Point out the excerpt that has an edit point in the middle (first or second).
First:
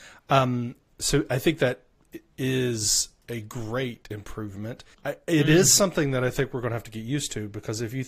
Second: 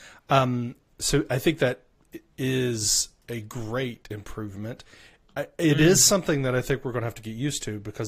first